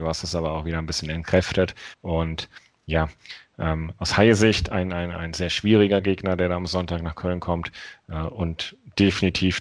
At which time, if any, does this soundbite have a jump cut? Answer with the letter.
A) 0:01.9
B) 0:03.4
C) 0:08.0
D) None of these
A